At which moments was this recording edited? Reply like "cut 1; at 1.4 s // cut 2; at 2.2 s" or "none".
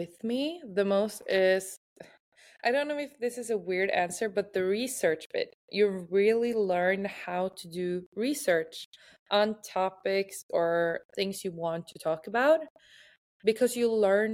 none